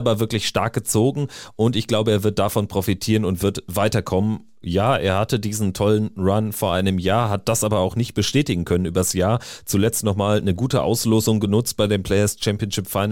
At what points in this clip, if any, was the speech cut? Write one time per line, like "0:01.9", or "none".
0:04.6